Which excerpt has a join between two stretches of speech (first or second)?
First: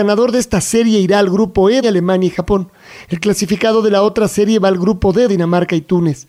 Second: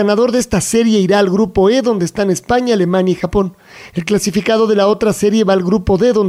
first